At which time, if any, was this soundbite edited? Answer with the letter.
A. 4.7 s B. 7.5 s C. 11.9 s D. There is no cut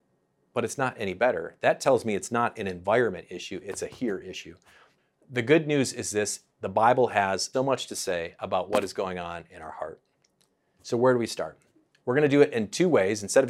B